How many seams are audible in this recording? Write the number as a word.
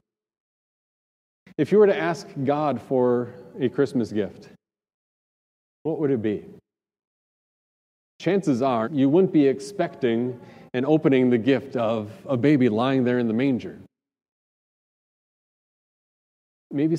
one